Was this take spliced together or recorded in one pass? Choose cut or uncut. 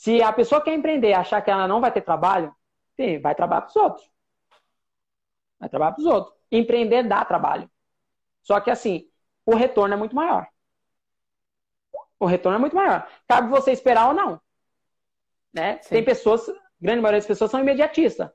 uncut